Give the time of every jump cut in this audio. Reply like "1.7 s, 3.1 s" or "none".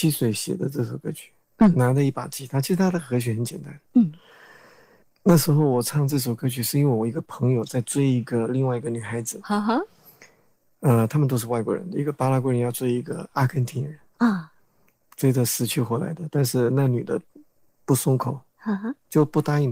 none